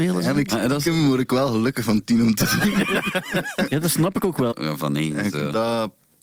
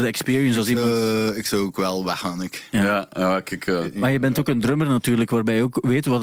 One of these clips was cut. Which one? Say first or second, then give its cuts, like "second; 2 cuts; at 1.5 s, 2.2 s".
first; 1 cut; at 4.5 s